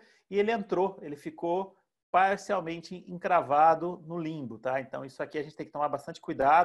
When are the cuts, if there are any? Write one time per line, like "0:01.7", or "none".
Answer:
none